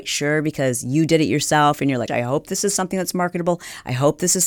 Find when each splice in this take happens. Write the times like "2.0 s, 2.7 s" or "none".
2.1 s

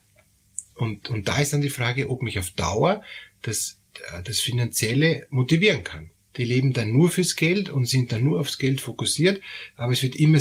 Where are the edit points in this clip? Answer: 6.3 s, 7.7 s

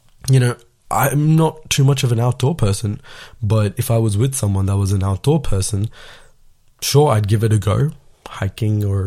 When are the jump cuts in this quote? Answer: none

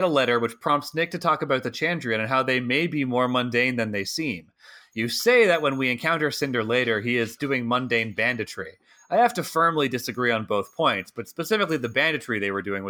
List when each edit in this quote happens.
7.4 s

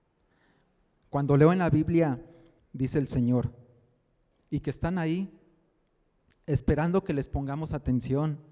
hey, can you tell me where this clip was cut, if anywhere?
2.6 s, 4.3 s

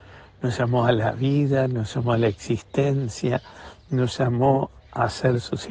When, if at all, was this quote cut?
none

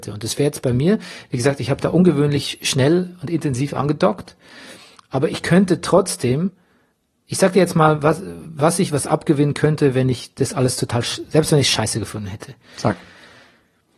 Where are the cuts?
none

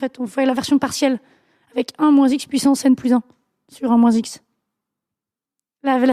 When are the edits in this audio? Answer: none

